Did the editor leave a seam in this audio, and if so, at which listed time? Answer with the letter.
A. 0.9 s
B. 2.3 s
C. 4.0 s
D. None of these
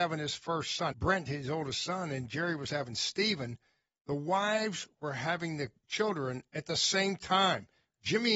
A